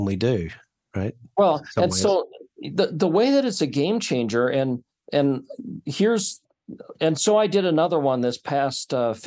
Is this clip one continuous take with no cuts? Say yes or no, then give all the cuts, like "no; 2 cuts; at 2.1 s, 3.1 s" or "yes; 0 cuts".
yes; 0 cuts